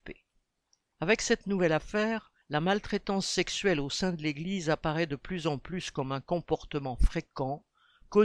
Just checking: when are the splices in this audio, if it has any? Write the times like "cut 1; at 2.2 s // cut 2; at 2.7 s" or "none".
cut 1; at 0.9 s // cut 2; at 2.4 s